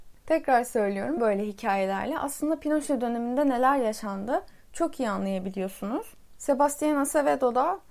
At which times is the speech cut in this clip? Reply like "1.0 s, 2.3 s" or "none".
1.2 s, 6.4 s